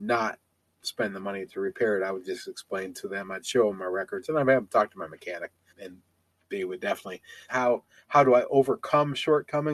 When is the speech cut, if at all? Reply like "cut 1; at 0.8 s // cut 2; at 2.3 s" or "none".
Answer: cut 1; at 5.7 s // cut 2; at 7.5 s